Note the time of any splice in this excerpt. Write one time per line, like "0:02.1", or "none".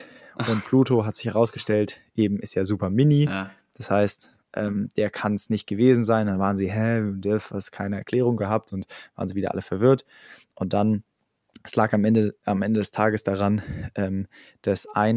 none

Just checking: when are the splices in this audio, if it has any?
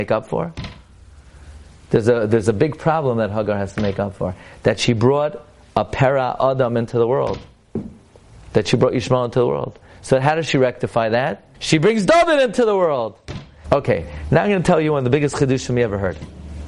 0:11.5
0:13.6

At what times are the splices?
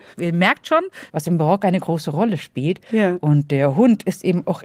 0:01.1

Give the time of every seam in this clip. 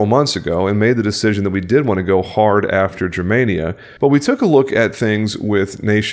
0:04.0

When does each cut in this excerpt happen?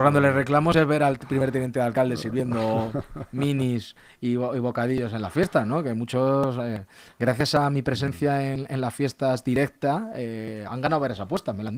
none

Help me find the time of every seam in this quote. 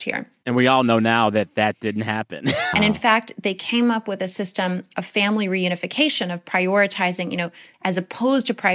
0:02.7
0:07.7

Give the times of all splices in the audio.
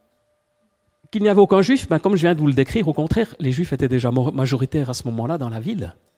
none

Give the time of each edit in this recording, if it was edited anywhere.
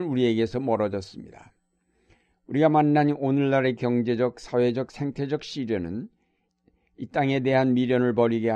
none

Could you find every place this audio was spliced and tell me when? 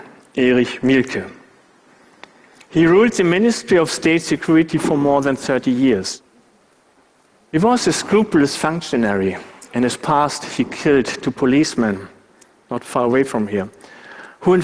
none

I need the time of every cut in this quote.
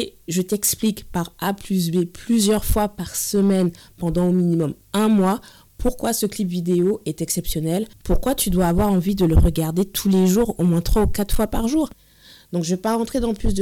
0:08.0

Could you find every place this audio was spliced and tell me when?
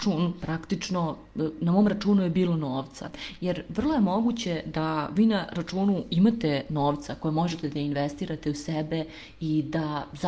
0:03.4

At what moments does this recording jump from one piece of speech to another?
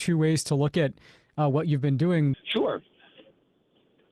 0:02.3

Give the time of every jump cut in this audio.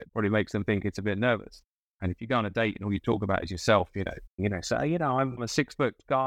0:01.9
0:04.4

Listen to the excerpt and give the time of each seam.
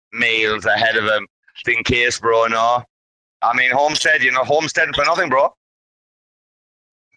0:01.6

